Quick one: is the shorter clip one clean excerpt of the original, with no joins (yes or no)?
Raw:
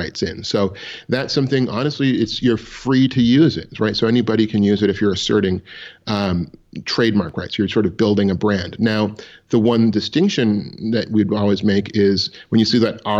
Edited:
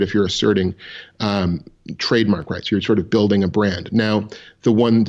yes